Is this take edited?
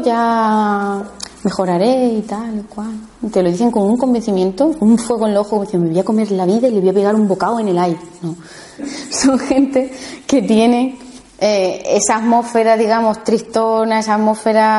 yes; 1 cut; at 8.8 s

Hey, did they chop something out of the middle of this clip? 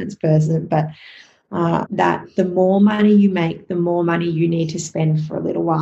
yes; 1 cut; at 1.9 s

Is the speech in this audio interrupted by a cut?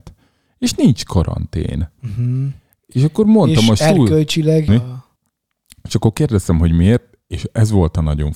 yes; 1 cut; at 4.7 s

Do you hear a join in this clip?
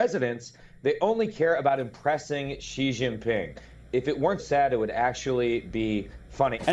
yes; 1 cut; at 4.4 s

